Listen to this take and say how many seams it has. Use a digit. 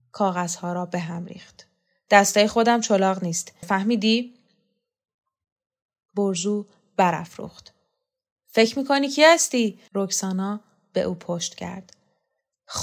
2